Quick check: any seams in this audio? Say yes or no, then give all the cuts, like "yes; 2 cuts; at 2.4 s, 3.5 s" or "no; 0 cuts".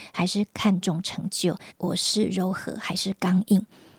yes; 1 cut; at 1.7 s